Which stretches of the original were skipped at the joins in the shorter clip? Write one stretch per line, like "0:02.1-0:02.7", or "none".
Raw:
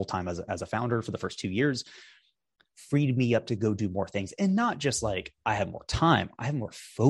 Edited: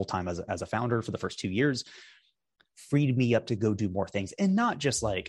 none